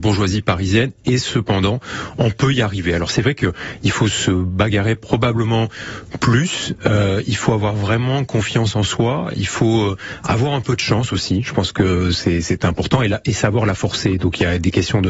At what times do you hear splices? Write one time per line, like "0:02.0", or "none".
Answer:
none

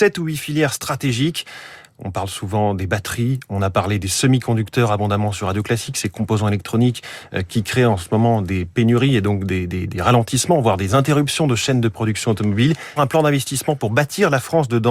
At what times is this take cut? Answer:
0:13.0

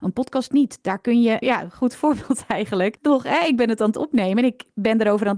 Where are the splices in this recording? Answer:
0:01.4

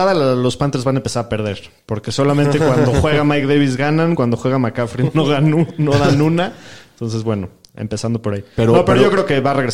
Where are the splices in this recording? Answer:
none

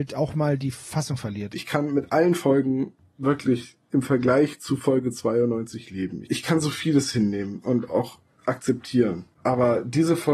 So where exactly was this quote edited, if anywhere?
0:01.5

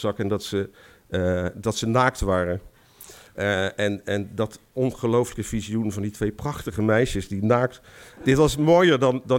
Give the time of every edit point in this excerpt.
0:08.2

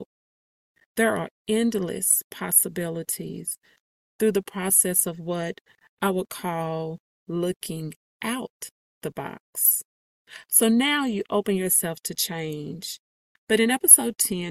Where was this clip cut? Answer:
0:13.4

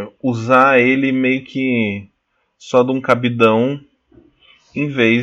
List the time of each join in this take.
none

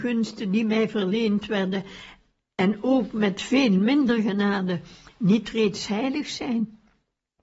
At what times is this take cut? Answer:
none

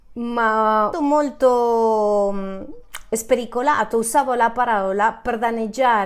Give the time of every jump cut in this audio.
0:00.9

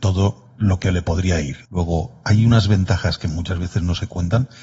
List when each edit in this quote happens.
0:01.6

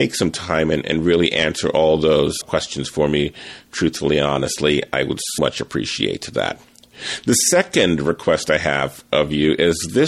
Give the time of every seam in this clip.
0:02.4
0:05.4

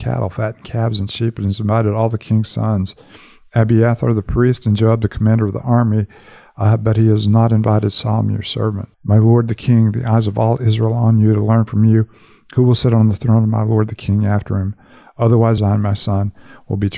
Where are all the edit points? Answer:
0:08.9
0:15.6

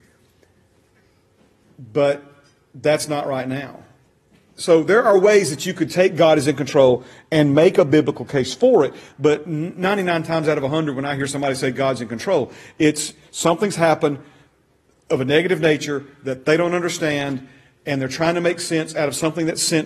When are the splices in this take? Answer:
none

